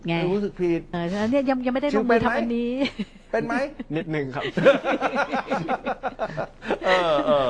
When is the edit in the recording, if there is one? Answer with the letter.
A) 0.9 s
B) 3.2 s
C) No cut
A